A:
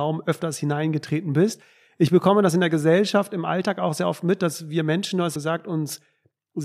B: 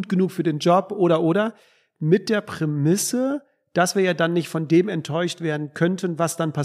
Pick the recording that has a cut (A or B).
A